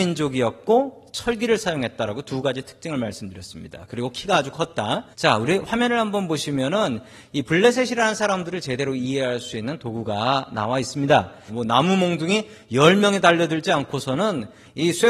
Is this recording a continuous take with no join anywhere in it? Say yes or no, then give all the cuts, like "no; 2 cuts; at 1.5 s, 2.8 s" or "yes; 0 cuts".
no; 2 cuts; at 5.1 s, 11.5 s